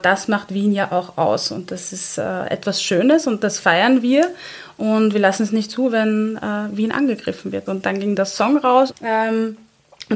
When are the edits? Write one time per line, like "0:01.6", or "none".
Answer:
0:07.7
0:08.9